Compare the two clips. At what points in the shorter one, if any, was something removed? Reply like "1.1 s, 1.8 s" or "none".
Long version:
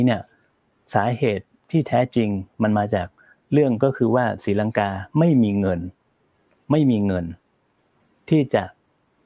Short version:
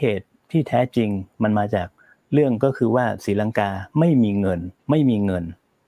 4.8 s